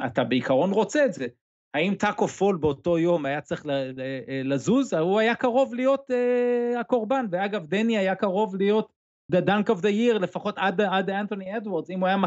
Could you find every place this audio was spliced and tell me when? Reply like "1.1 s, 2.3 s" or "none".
none

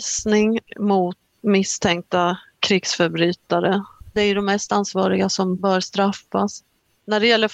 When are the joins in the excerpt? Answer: 1.3 s, 4.1 s

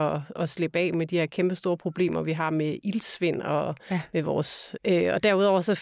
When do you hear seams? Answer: 4.8 s

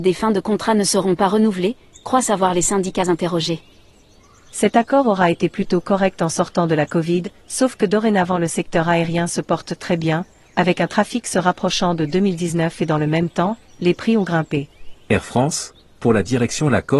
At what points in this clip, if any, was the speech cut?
14.9 s

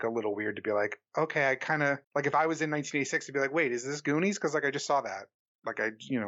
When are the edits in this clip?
2.1 s

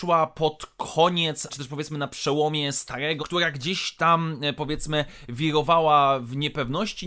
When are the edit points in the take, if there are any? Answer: 1.5 s, 3.2 s

